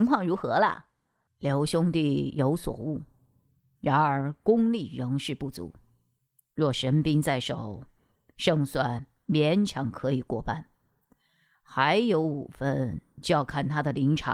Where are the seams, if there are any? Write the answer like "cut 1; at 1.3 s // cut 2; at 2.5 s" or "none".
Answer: none